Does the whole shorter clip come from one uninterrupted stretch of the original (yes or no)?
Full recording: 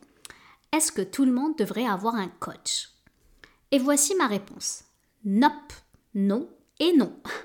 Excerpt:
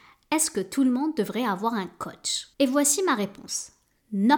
no